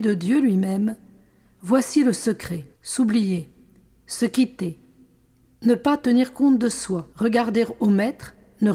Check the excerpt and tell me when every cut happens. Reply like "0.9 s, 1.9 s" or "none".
2.7 s, 7.1 s

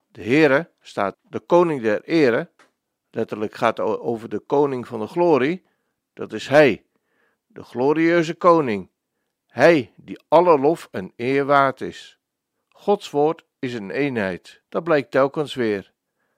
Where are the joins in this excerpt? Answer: 1.1 s, 12.6 s, 14.6 s

